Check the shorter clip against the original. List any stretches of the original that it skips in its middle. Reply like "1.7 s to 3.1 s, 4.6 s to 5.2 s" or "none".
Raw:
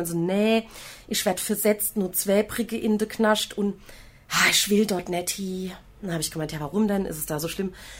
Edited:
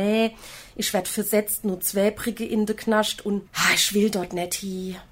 3.8 s to 4.2 s